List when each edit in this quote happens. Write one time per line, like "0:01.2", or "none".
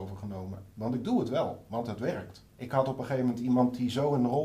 0:02.5